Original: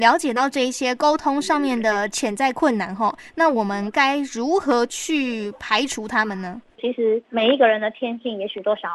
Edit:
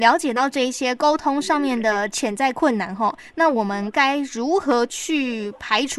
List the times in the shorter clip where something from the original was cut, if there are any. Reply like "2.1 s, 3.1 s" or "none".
none